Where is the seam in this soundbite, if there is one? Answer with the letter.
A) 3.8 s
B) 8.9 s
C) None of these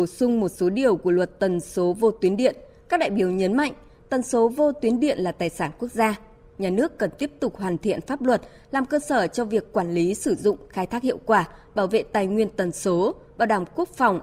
C